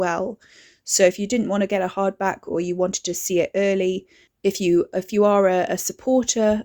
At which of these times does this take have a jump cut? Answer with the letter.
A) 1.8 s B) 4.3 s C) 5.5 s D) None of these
B